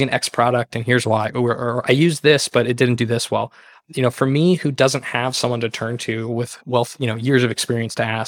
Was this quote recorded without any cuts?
yes; 0 cuts

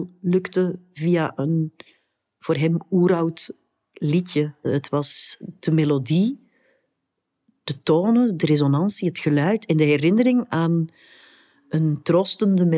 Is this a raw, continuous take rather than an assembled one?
yes; 0 cuts

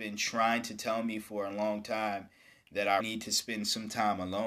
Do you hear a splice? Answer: yes; 1 cut; at 3.0 s

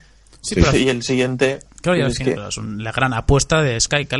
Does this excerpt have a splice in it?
yes; 1 cut; at 2.4 s

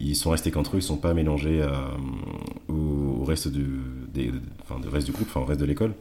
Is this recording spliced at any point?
no; 0 cuts

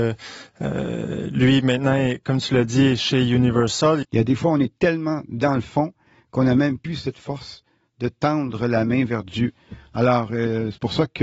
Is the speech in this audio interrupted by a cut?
yes; 1 cut; at 4.0 s

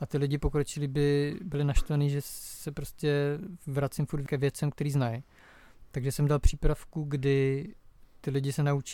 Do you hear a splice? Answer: no; 0 cuts

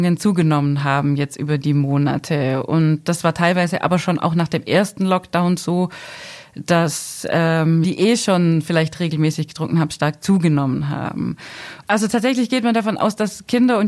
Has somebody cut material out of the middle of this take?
yes; 2 cuts; at 7.8 s, 11.8 s

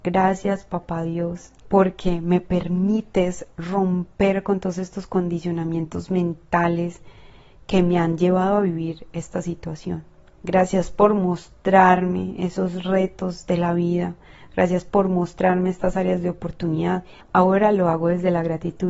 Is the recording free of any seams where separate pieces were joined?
no; 2 cuts; at 1.6 s, 17.2 s

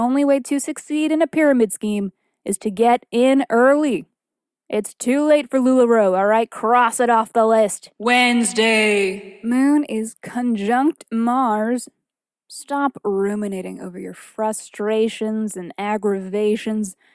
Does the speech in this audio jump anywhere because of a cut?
no; 0 cuts

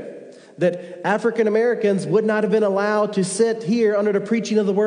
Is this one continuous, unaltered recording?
yes; 0 cuts

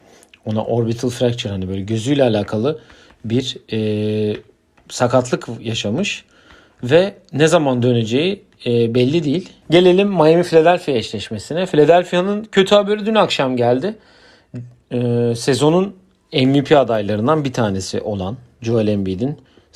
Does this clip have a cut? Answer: yes; 1 cut; at 9.6 s

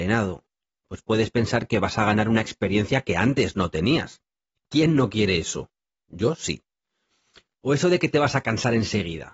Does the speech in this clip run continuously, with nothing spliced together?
no; 1 cut; at 4.6 s

